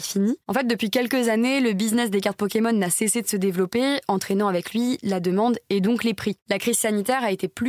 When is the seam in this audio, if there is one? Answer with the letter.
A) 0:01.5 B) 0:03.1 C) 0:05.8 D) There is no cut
D